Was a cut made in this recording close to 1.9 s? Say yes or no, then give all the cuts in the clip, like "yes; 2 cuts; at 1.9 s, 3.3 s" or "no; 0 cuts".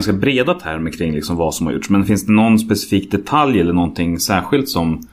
no; 0 cuts